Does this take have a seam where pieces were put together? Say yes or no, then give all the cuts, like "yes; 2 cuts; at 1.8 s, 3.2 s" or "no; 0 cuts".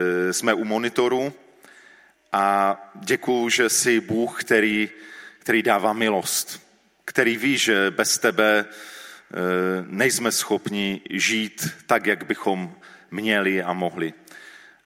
no; 0 cuts